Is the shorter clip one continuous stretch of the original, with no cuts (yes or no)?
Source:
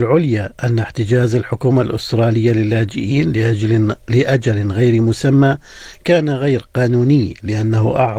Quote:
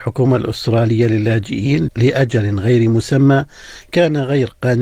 no